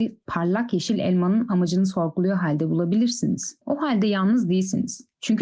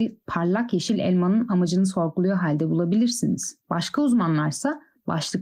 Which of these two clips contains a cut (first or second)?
second